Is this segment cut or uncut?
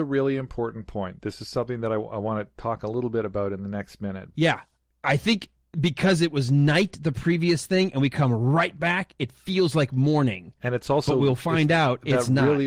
cut